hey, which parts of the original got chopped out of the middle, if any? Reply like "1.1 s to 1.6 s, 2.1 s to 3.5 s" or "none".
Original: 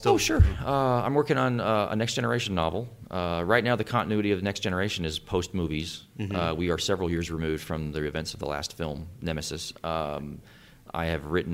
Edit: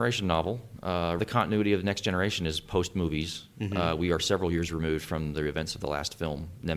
3.5 s to 3.8 s